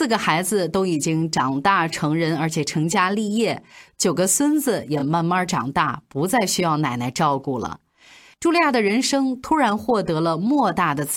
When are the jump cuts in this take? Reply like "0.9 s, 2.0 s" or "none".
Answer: none